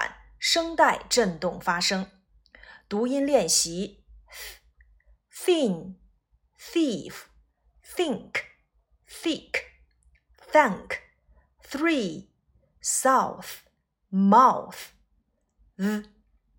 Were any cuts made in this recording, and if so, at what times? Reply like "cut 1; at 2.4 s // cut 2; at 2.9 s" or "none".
none